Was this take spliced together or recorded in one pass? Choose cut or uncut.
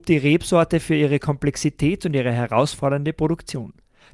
uncut